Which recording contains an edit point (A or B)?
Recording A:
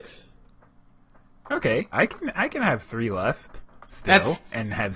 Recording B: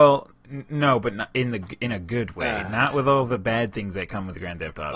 A